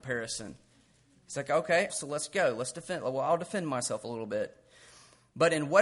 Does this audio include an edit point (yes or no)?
yes